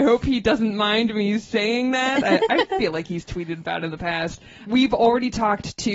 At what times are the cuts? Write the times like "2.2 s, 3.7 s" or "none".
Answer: none